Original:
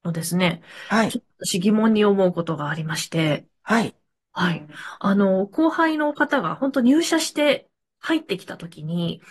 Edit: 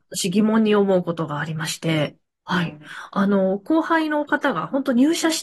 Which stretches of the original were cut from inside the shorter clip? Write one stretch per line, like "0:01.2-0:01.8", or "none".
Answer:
0:03.5-0:04.1

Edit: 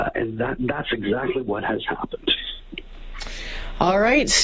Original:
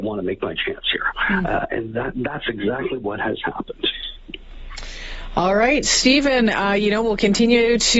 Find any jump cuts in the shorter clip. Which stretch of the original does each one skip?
none

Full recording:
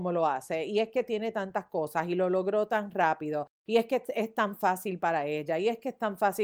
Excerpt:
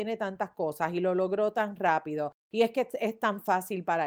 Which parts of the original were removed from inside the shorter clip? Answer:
none

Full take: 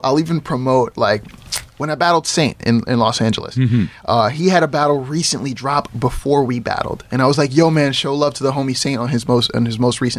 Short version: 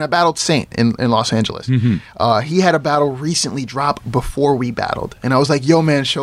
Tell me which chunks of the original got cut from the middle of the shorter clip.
none

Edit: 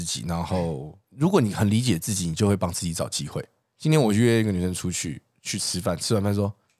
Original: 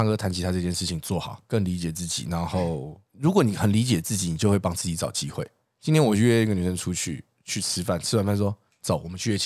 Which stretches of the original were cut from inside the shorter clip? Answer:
none

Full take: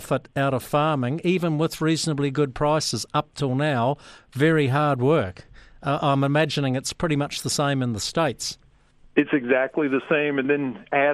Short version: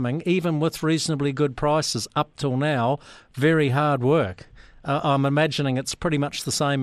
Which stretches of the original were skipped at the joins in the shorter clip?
none

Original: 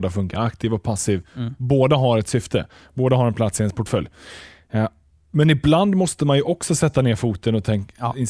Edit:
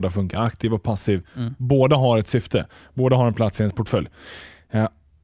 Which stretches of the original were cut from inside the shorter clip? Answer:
none

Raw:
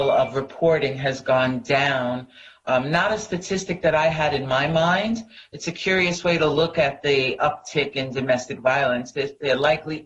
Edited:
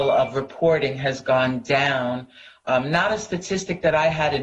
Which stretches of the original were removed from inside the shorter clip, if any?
none

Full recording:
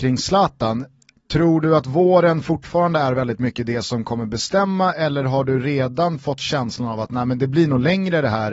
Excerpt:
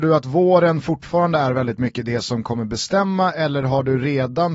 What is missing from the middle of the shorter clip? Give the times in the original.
none

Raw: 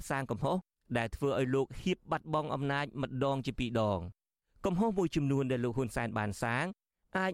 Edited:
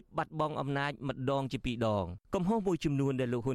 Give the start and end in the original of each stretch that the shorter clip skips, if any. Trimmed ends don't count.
0:04.2-0:04.6

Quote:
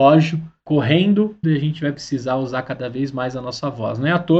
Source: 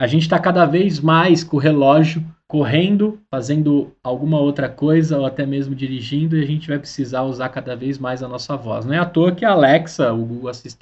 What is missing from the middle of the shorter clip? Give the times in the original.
0:03.3-0:06.3

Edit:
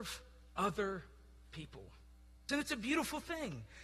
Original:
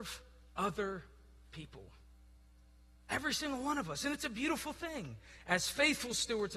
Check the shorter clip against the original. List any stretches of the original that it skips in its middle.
0:02.5-0:04.0

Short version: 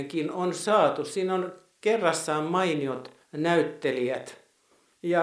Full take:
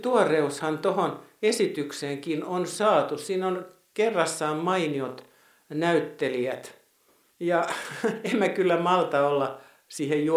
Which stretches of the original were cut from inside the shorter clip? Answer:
0:05.4-0:05.6

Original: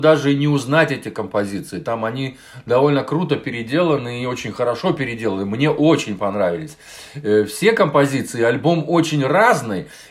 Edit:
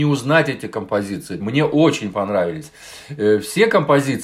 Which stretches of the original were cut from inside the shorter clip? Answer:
0:01.8-0:05.5

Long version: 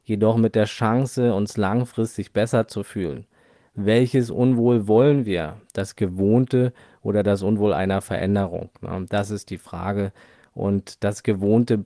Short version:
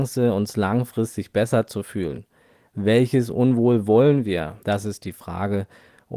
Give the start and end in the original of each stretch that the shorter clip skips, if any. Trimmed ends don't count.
0:05.6-0:09.1

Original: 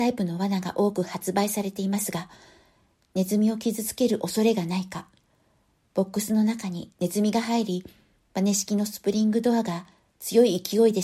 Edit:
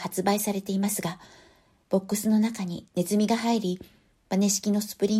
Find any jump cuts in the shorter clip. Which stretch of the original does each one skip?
0:02.9-0:05.9

